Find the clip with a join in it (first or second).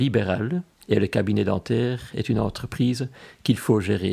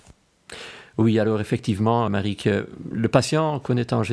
second